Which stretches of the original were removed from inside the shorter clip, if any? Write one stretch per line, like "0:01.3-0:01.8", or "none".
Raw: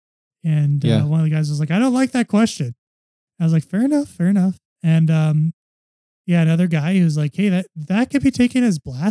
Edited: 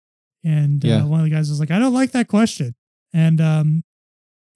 0:03.0-0:04.7